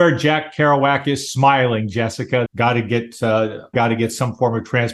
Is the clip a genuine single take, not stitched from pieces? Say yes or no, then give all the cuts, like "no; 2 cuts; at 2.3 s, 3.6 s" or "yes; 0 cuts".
no; 2 cuts; at 2.5 s, 3.7 s